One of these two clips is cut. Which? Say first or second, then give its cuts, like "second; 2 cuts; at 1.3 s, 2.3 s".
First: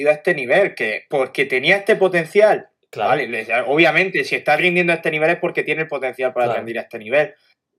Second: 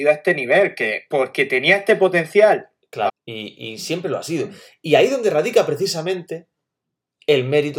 second; 1 cut; at 3.1 s